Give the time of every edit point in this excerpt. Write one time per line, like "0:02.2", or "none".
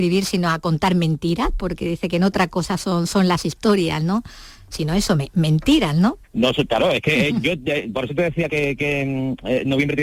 0:06.2
0:08.5